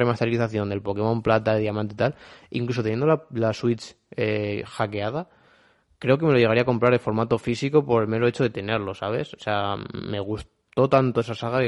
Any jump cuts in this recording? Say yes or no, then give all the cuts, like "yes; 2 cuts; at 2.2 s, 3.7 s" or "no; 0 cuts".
no; 0 cuts